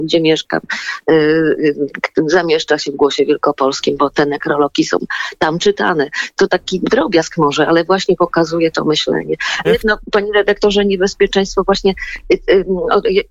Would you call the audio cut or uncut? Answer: cut